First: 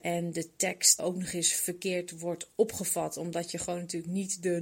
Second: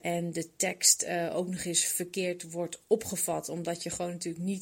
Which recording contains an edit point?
first; 1 cut; at 1.0 s

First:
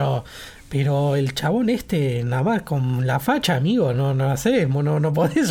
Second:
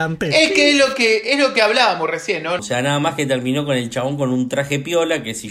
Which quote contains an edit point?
second; 1 cut; at 2.6 s

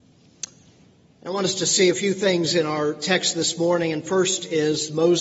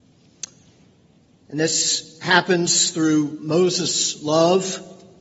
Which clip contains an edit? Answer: first; 1 cut; at 1.1 s

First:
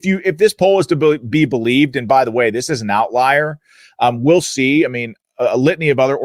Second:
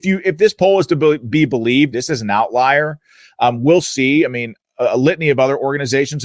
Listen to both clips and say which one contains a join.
second; 1 cut; at 1.9 s

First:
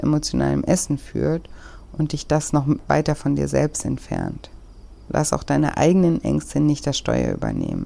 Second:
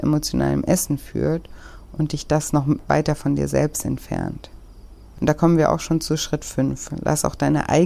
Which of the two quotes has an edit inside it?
first; 1 cut; at 5.1 s

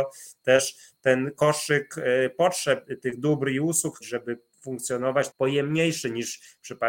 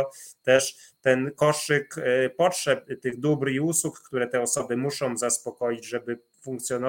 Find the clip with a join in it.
first; 2 cuts; at 4.0 s, 5.3 s

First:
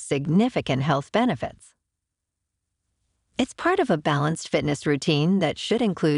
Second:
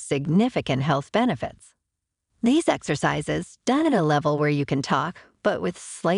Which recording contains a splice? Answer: second; 1 cut; at 2.3 s

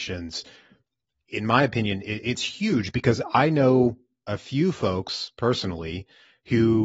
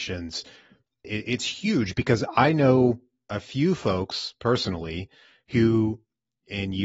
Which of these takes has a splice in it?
second; 1 cut; at 1.0 s

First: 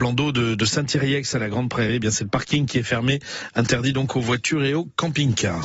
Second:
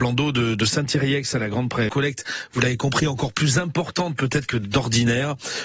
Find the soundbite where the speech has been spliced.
second; 1 cut; at 1.9 s

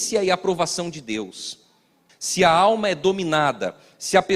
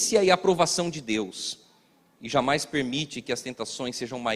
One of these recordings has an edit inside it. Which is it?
first; 1 cut; at 2.1 s

